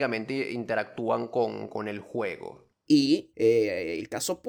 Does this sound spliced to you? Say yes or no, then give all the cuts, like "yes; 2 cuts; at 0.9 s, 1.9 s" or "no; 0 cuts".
yes; 1 cut; at 2.9 s